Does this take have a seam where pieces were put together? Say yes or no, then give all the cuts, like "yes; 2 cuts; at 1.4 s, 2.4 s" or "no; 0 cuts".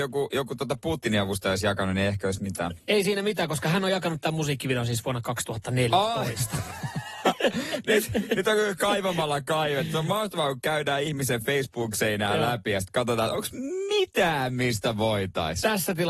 no; 0 cuts